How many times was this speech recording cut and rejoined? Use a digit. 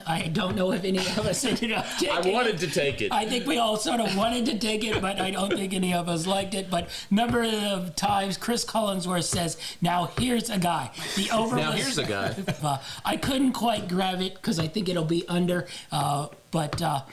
1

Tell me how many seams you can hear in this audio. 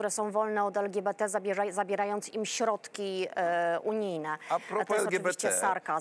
0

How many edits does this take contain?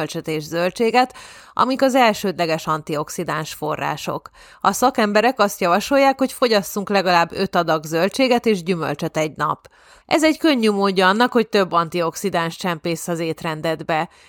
1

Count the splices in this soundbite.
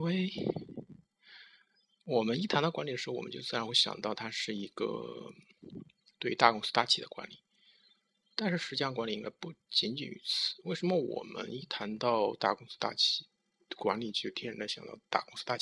0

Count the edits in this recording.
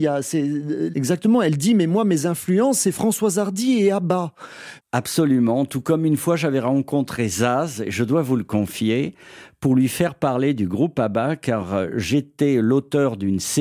2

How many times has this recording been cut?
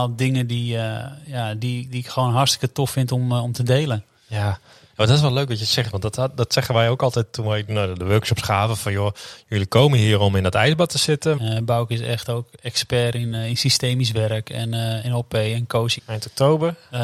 2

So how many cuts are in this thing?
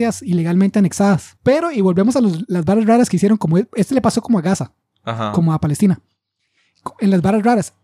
1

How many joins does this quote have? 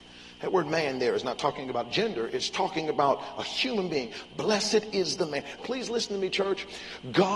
1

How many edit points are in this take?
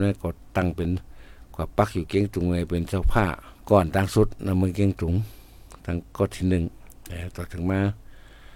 1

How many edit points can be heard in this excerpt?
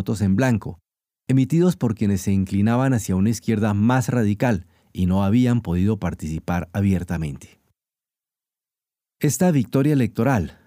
0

